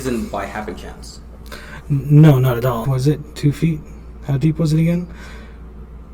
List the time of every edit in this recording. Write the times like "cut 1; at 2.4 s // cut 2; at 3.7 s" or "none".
cut 1; at 2.8 s